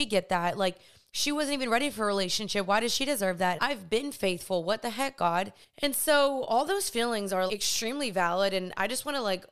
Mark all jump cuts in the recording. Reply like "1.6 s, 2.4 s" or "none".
3.6 s, 7.5 s

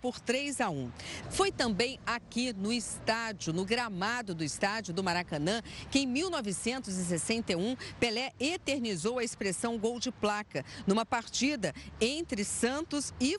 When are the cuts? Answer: 1.2 s

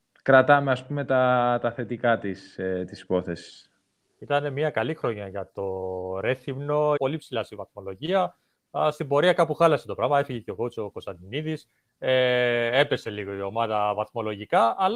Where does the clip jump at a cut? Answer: 7.0 s

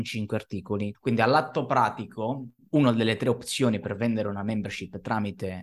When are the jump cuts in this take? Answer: 0.9 s, 2.7 s

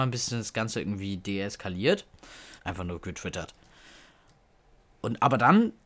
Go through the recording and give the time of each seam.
2.6 s

